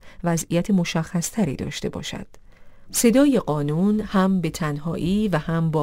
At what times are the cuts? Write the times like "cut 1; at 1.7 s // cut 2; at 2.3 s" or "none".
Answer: cut 1; at 2.9 s